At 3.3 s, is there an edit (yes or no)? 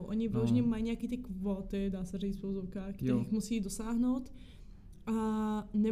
no